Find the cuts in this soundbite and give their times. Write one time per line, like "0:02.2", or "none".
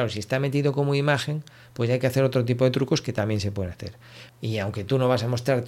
0:04.3